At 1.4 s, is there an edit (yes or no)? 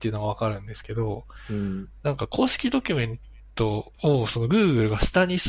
no